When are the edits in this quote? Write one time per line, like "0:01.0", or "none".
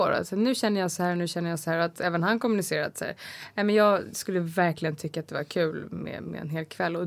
none

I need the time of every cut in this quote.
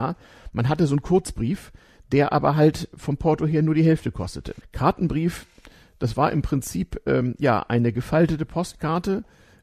0:04.6

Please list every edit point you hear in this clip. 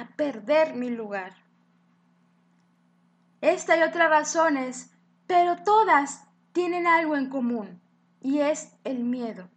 none

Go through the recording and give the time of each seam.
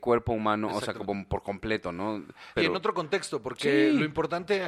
0:02.6

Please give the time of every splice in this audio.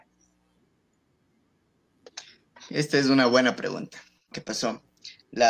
0:04.3

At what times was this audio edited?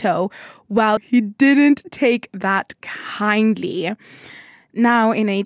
0:01.0

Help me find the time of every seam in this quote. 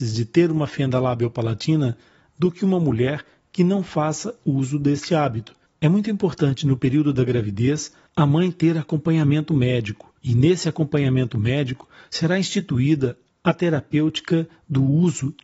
0:05.7
0:10.2

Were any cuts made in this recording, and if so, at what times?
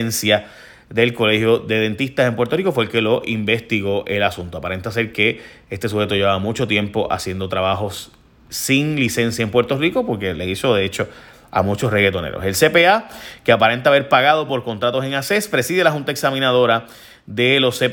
none

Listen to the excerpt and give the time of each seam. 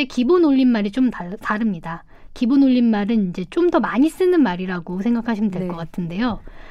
none

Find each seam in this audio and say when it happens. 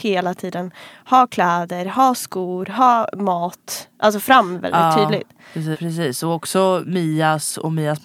0:05.7

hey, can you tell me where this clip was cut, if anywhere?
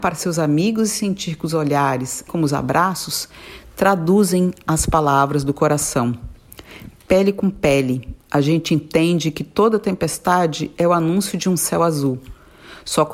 0:02.3

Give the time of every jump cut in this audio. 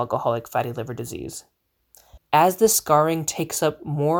0:02.2

